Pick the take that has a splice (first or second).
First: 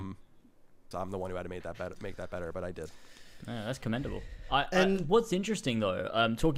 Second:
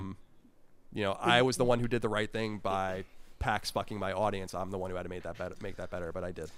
first